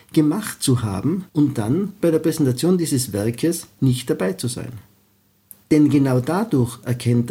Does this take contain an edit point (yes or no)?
yes